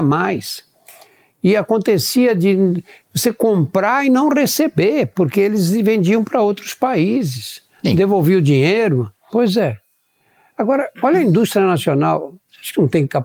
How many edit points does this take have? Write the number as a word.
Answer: two